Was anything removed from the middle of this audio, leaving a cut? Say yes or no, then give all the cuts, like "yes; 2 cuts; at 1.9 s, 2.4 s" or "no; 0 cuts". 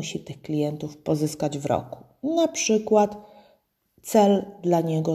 no; 0 cuts